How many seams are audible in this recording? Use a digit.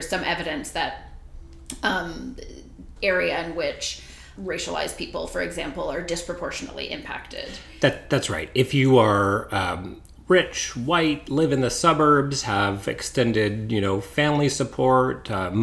2